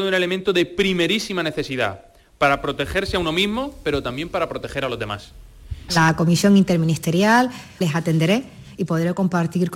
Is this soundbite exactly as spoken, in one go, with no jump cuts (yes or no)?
no